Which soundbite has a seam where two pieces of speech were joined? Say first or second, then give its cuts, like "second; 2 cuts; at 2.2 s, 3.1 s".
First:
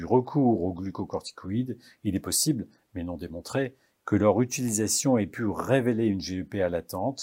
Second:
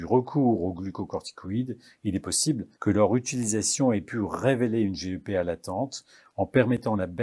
second; 1 cut; at 2.7 s